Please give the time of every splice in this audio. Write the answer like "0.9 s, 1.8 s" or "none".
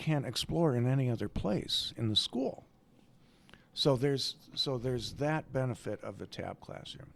none